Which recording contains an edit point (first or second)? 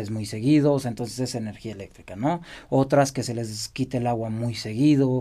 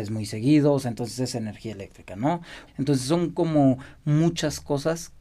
second